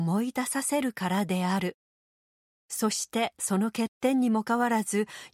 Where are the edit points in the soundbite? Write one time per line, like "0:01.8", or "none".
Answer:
0:04.4